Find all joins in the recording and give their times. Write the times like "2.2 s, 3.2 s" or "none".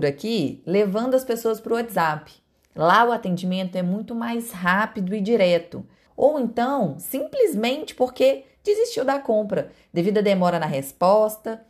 6.1 s